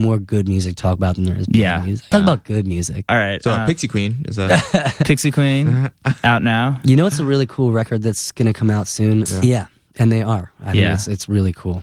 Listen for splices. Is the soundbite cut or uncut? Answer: cut